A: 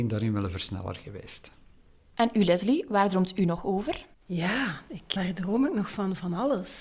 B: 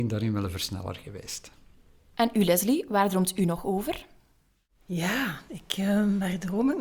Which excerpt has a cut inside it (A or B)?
A